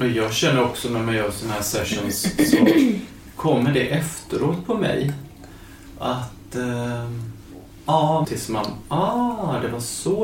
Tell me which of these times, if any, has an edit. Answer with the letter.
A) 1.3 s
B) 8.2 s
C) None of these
B